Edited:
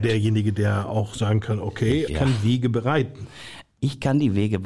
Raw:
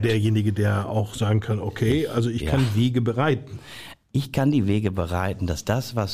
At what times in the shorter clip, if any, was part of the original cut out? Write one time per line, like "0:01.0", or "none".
0:02.1